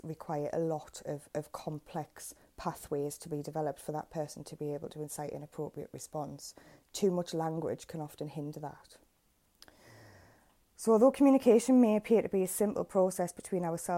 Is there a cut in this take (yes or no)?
no